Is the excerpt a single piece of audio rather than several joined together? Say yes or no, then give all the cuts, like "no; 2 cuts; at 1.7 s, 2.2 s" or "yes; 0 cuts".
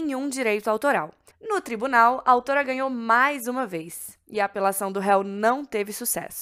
no; 1 cut; at 1.3 s